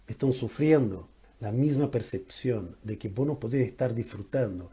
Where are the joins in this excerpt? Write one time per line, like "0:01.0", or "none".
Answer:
0:01.2